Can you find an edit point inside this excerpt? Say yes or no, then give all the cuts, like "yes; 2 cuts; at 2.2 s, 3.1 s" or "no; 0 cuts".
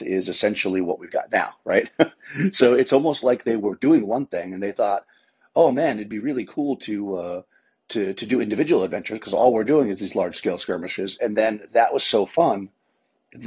no; 0 cuts